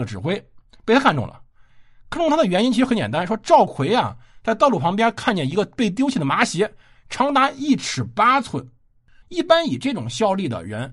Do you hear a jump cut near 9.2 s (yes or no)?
yes